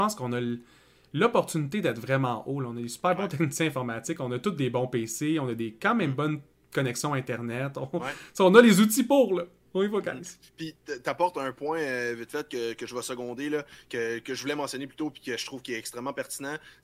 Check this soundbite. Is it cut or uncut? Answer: uncut